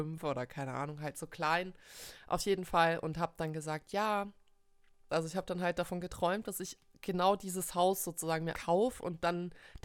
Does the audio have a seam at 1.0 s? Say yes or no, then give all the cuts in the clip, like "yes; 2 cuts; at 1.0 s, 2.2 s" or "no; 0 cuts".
no; 2 cuts; at 5.1 s, 8.5 s